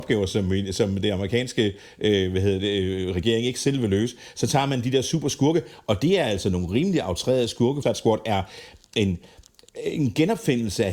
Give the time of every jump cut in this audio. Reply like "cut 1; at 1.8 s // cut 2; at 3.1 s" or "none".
cut 1; at 7.8 s